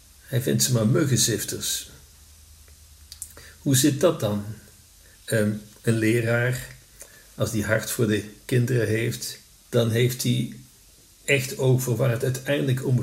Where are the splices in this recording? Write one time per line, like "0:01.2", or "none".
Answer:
0:05.1
0:09.6